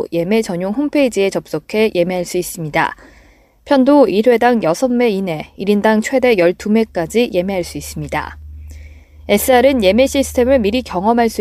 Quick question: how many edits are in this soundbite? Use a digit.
0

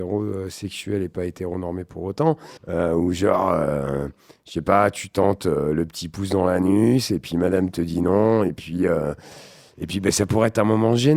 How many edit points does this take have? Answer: 1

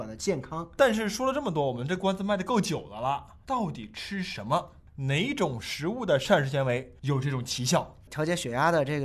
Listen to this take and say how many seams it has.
0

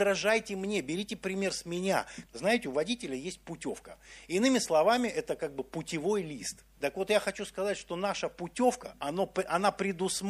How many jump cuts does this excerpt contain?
2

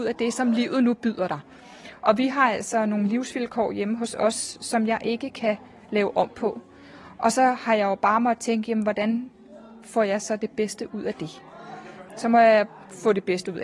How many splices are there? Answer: 1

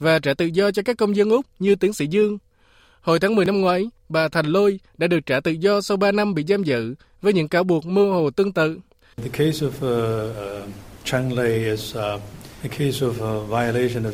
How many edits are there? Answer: 2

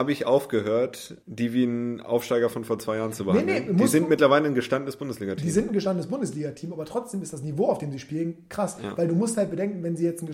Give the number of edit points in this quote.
1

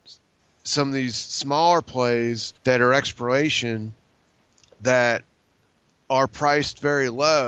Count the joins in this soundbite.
1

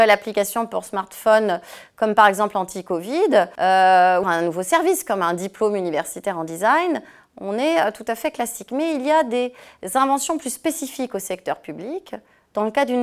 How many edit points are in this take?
1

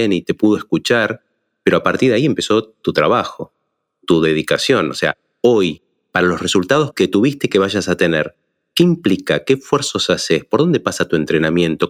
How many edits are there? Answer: 0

